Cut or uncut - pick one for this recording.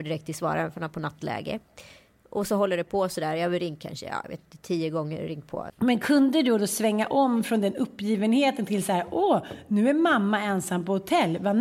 cut